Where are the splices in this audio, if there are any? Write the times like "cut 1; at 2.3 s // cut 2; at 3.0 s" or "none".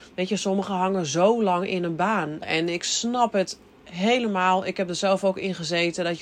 cut 1; at 2.4 s

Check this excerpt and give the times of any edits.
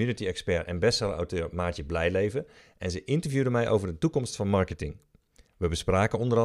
none

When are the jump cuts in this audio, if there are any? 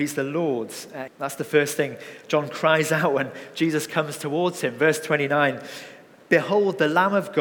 cut 1; at 1.1 s

